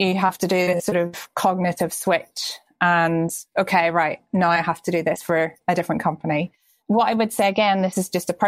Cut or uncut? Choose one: uncut